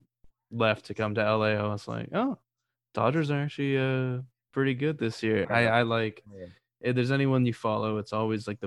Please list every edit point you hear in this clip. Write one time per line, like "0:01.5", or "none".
0:05.4